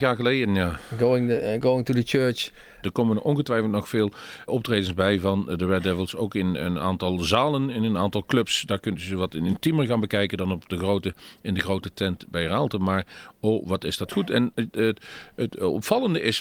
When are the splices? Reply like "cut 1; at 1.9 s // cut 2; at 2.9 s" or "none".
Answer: cut 1; at 2.8 s // cut 2; at 4.5 s